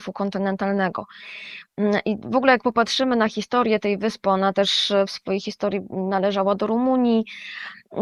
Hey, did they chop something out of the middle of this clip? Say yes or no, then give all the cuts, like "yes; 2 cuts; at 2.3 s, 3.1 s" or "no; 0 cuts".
no; 0 cuts